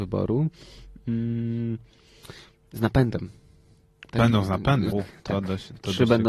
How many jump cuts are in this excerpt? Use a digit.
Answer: 1